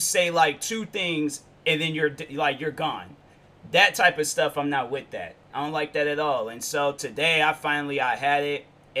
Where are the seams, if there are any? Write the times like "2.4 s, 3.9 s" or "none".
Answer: 5.5 s